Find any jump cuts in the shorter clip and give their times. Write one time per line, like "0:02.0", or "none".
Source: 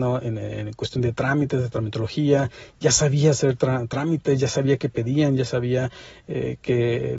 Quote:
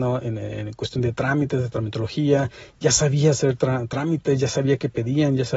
none

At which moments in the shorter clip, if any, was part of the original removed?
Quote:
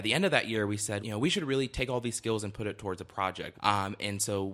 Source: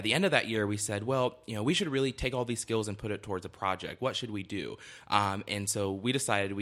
0:01.0
0:03.5

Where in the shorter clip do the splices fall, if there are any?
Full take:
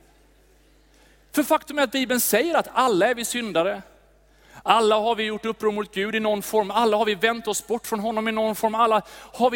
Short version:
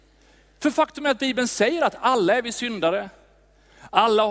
none

